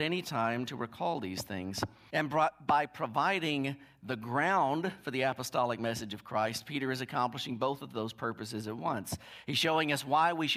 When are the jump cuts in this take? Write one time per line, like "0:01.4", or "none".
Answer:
0:02.1

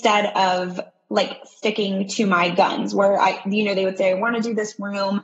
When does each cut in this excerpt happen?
none

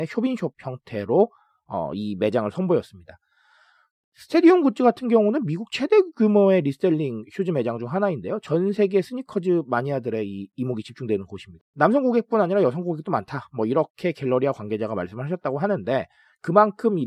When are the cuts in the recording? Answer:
0:11.6

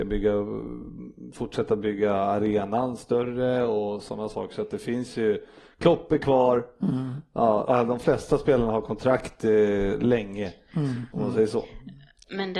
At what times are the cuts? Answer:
0:07.6
0:11.1

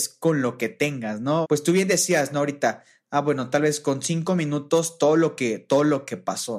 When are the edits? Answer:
0:01.4

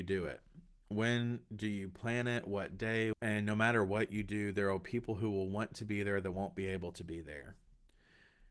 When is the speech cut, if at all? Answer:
0:03.1

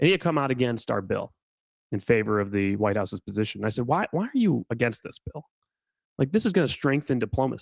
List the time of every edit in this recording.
none

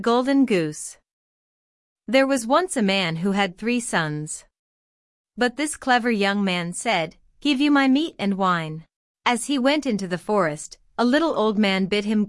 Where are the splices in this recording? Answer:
0:05.2
0:09.1

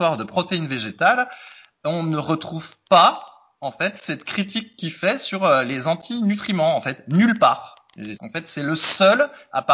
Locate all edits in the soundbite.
0:08.2

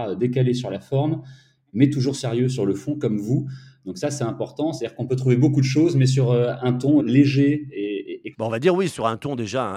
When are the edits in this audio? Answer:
0:07.0
0:08.3

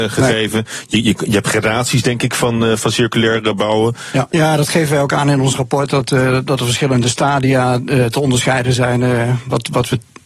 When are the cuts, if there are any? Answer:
0:04.3

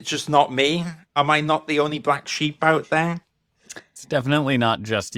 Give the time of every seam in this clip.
none

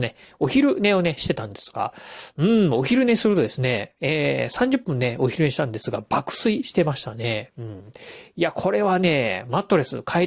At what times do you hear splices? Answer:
none

